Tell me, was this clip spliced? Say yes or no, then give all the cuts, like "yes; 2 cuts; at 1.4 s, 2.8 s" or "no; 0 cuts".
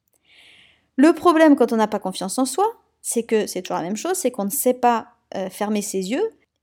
no; 0 cuts